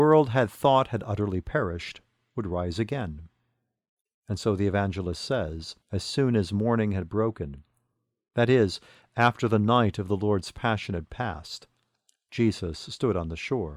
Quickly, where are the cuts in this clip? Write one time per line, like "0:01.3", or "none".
0:04.1
0:05.8